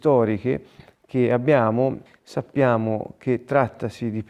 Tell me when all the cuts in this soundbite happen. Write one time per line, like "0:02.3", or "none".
0:02.1